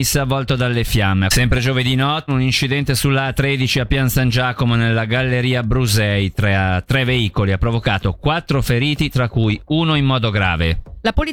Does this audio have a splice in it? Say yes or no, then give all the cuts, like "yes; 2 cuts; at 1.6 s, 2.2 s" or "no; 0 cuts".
yes; 2 cuts; at 1.3 s, 2.3 s